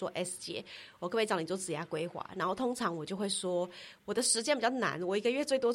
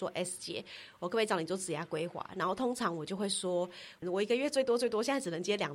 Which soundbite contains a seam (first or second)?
second